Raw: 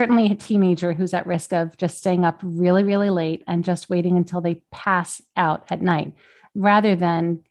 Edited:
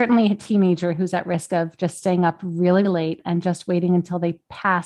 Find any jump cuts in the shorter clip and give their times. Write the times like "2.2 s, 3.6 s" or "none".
2.8 s